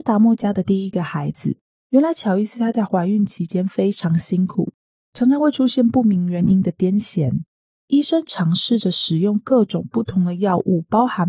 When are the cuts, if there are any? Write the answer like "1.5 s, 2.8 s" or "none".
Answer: 1.8 s